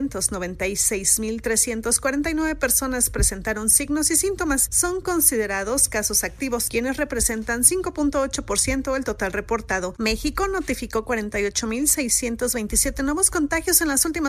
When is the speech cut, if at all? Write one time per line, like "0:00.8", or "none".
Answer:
0:09.9